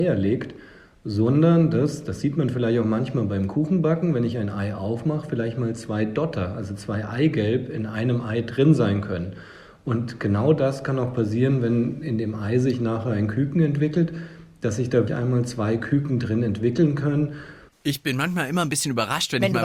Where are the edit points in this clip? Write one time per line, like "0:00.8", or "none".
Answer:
0:15.1
0:17.7